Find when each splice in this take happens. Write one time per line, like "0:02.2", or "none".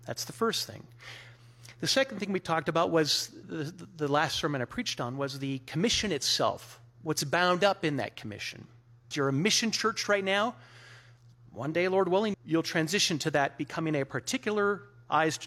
0:03.4
0:09.1
0:12.3